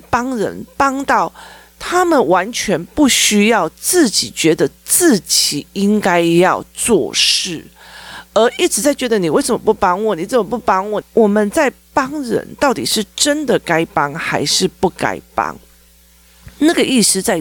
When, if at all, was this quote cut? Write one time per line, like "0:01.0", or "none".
0:11.0